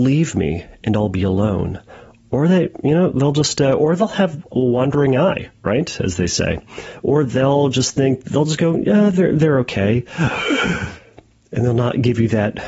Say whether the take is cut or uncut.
uncut